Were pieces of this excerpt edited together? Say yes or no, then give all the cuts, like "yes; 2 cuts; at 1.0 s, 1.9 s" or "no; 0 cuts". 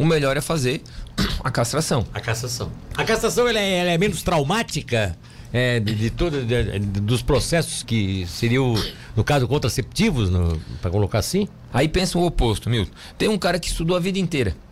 yes; 2 cuts; at 7.8 s, 11.7 s